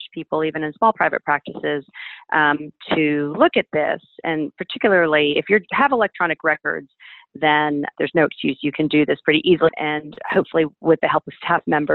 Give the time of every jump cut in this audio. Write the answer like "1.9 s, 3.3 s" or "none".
9.7 s